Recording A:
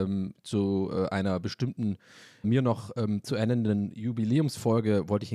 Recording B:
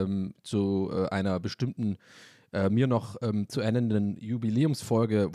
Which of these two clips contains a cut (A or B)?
A